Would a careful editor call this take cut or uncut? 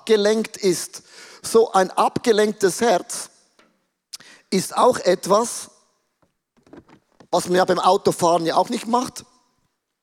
cut